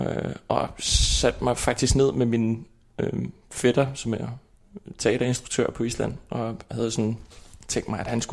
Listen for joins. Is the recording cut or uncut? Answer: uncut